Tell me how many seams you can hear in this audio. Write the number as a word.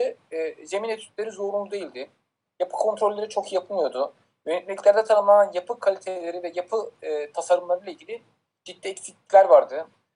zero